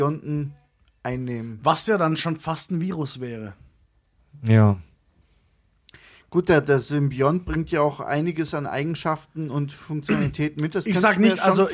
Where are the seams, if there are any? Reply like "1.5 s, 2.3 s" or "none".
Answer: none